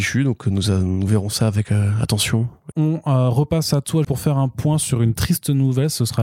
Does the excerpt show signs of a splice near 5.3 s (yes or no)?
no